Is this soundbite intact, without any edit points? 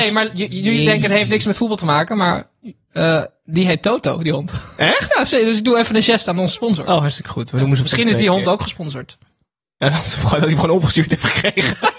yes; 0 cuts

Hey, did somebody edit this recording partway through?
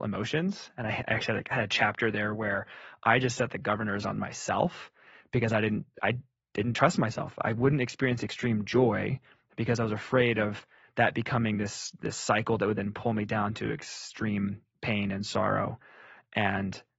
no; 0 cuts

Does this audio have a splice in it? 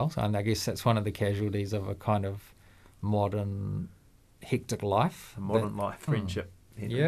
yes; 1 cut; at 6.1 s

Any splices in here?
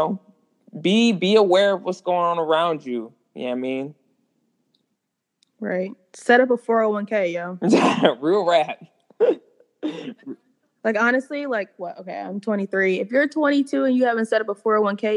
no; 0 cuts

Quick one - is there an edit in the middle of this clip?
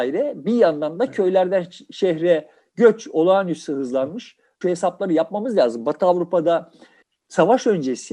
no; 0 cuts

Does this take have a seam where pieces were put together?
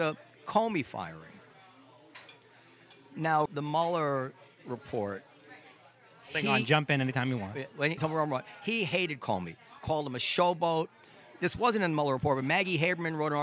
yes; 2 cuts; at 3.5 s, 8.0 s

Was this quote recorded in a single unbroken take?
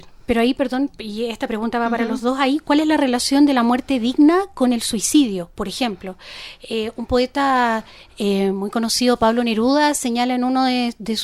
yes; 0 cuts

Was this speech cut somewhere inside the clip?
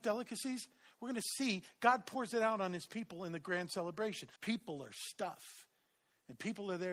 yes; 1 cut; at 4.4 s

